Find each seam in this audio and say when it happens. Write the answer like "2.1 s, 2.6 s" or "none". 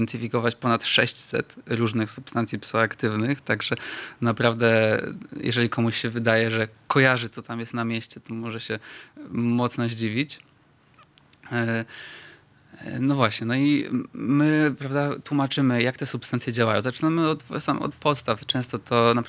none